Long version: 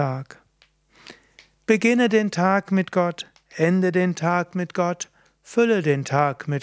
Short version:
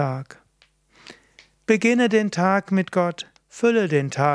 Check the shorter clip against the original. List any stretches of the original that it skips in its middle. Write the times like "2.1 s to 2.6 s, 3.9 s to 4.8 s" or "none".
3.4 s to 5.3 s